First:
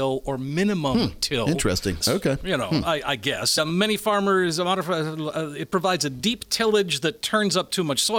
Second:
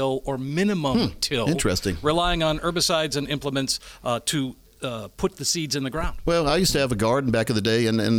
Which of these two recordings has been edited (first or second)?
first